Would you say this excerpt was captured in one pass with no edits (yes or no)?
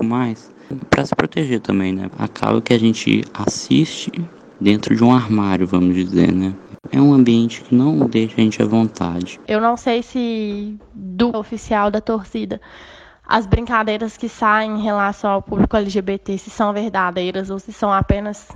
no